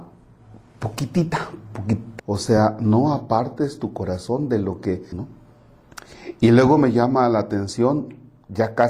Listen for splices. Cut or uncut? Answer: cut